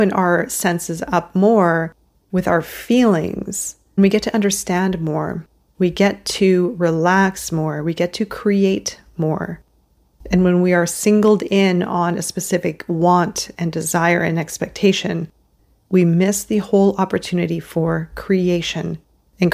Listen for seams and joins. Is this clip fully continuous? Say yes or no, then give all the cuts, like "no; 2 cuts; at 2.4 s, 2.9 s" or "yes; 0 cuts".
no; 1 cut; at 4.0 s